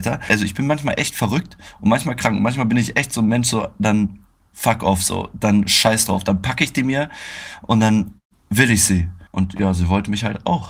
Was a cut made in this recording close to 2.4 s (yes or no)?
no